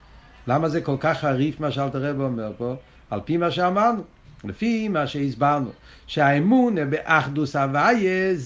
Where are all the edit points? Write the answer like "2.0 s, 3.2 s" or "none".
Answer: none